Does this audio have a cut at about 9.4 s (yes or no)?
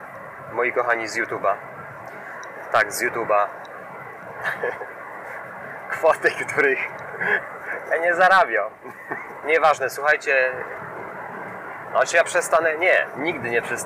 yes